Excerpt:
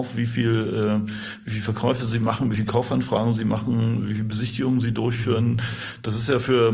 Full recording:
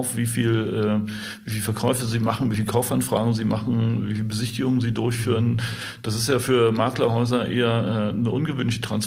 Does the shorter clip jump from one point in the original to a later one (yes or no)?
no